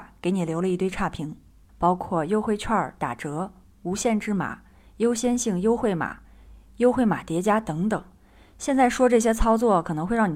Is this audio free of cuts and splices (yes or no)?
no